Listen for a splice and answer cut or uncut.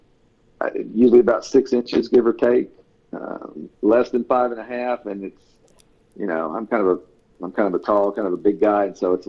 uncut